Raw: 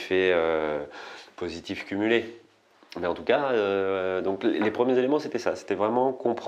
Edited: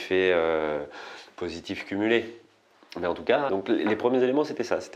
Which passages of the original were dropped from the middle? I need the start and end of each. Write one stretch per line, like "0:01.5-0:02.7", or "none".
0:03.5-0:04.2